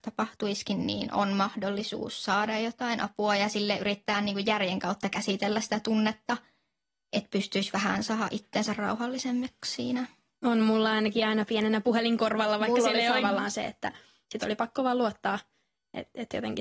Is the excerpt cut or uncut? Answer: cut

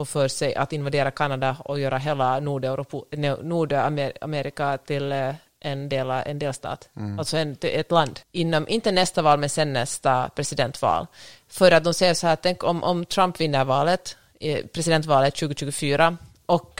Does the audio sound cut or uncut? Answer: cut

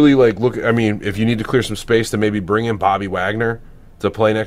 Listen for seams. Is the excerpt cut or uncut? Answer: uncut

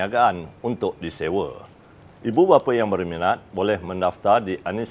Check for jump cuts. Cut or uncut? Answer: cut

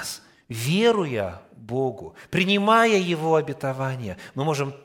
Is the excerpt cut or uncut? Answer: uncut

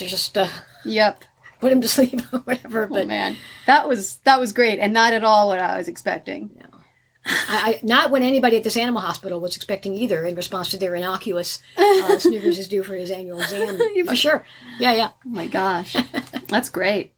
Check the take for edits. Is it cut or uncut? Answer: cut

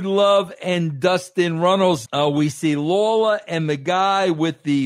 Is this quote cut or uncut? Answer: cut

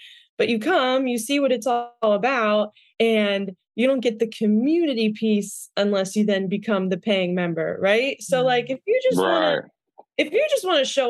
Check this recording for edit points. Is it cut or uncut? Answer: uncut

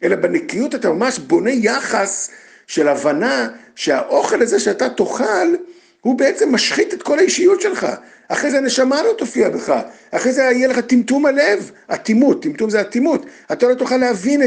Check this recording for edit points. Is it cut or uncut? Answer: uncut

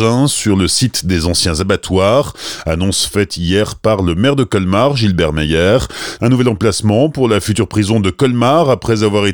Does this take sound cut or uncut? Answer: cut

